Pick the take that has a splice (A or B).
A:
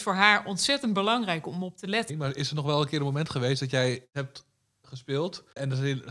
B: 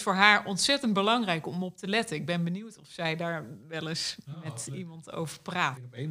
A